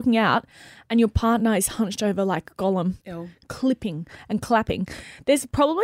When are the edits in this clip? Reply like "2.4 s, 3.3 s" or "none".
3.0 s